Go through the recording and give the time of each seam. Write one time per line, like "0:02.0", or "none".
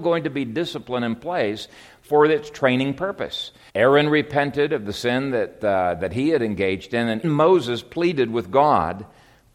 0:03.7
0:07.2

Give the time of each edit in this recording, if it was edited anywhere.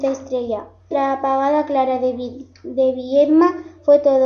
0:00.9

